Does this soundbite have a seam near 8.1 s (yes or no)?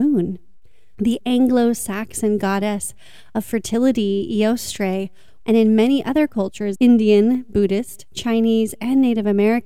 no